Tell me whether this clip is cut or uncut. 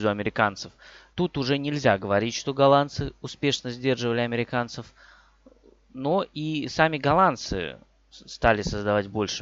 cut